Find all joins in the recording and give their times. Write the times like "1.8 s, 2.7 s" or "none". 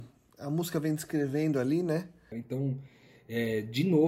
2.3 s